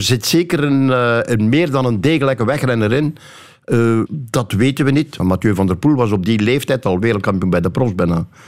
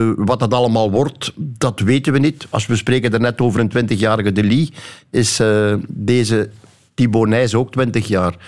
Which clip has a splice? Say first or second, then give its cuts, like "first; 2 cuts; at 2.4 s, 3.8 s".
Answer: first; 2 cuts; at 4.1 s, 5.2 s